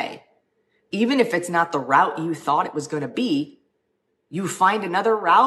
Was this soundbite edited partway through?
no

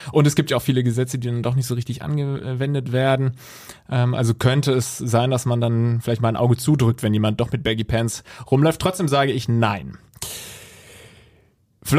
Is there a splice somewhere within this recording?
no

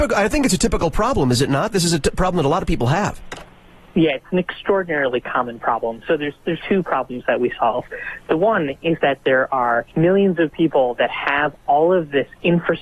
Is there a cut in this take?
yes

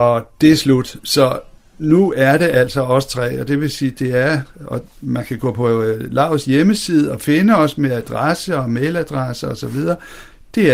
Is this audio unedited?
yes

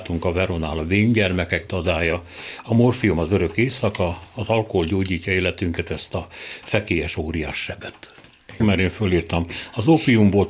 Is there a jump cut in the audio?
yes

